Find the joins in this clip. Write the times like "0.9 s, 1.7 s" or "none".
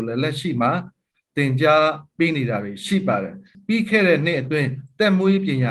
none